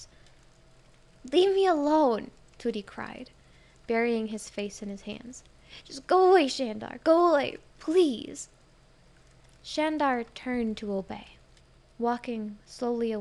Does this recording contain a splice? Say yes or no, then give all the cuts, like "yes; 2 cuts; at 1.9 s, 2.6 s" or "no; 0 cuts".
no; 0 cuts